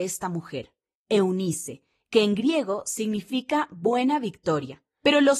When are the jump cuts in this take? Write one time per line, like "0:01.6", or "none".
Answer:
none

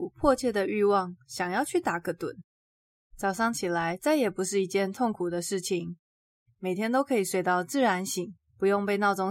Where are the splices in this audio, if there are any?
none

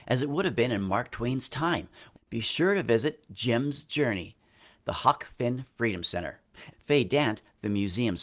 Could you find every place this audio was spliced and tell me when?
0:02.1
0:06.7

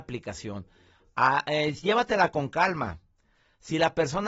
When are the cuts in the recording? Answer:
none

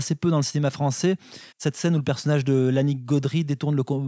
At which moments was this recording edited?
0:01.5

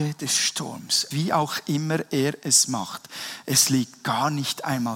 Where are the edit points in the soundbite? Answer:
0:01.1

